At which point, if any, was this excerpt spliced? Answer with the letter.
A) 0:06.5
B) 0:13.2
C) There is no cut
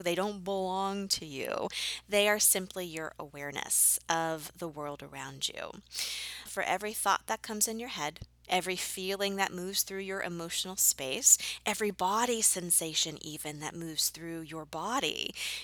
A